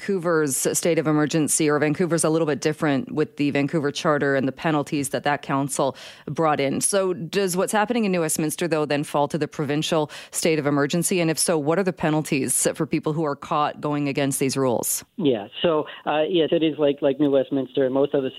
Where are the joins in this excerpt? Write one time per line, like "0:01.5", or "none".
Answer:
0:15.1
0:16.5